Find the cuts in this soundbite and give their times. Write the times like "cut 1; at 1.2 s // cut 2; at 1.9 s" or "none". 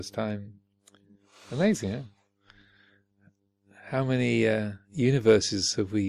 none